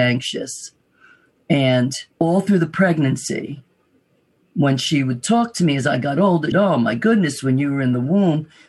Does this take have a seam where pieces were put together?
yes; 2 cuts; at 2.1 s, 6.5 s

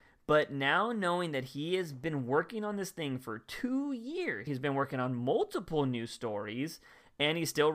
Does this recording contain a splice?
yes; 1 cut; at 4.5 s

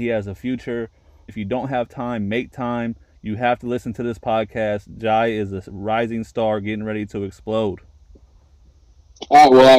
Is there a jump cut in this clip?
yes; 1 cut; at 1.3 s

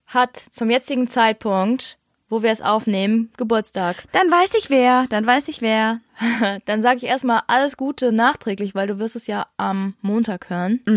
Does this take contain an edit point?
no; 0 cuts

